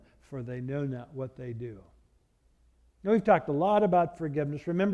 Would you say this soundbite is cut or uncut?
uncut